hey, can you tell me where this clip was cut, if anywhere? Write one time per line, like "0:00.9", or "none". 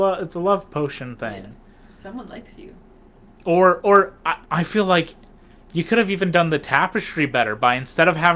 0:04.4